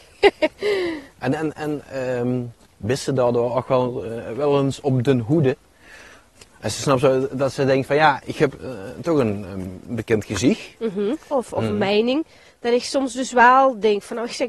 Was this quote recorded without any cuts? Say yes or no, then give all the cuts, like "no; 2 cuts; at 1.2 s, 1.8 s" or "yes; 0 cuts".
no; 1 cut; at 11.3 s